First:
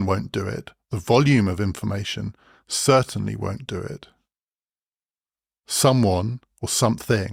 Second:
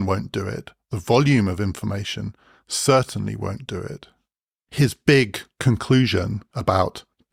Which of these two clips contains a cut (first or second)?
second